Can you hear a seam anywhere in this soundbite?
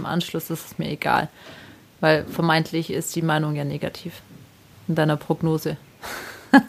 yes; 1 cut; at 4.7 s

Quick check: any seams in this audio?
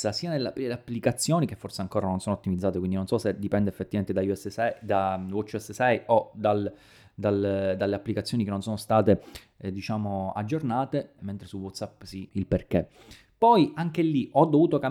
yes; 2 cuts; at 11.2 s, 12.3 s

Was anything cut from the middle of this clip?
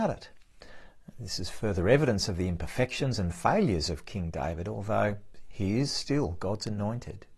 no; 0 cuts

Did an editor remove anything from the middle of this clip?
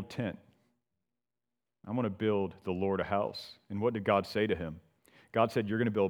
no; 0 cuts

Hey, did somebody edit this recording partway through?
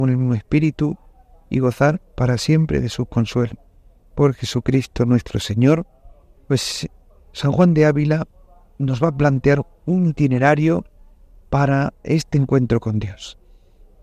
yes; 1 cut; at 6.4 s

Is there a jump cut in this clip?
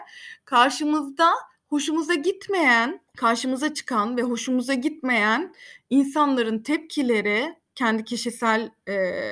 yes; 1 cut; at 3.1 s

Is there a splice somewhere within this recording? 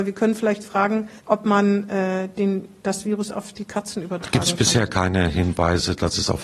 yes; 1 cut; at 1.2 s

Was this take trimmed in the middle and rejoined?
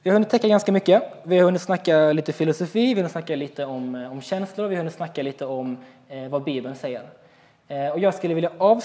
no; 0 cuts

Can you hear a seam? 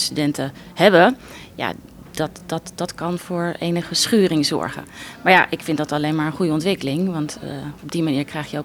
no; 0 cuts

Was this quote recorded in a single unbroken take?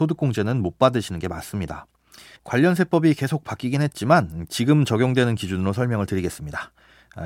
no; 1 cut; at 2.4 s

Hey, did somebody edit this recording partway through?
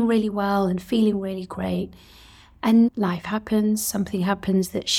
yes; 1 cut; at 2.9 s

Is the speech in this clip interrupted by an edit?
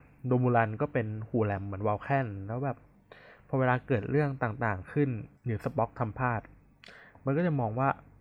yes; 1 cut; at 5.4 s

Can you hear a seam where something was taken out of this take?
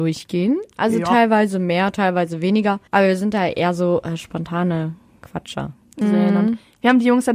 yes; 2 cuts; at 2.9 s, 6.0 s

